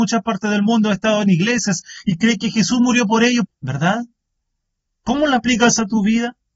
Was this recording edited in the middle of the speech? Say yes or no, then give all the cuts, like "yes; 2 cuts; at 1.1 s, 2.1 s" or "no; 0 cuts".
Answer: yes; 1 cut; at 3.5 s